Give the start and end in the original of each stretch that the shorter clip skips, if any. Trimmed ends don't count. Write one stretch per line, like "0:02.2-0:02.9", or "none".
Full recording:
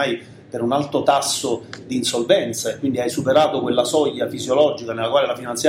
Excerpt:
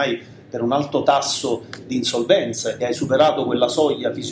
0:02.8-0:03.0